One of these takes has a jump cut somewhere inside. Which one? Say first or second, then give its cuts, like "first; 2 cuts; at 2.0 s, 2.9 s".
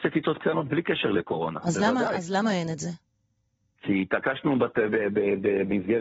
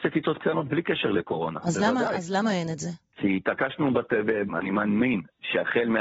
second; 2 cuts; at 3.1 s, 4.5 s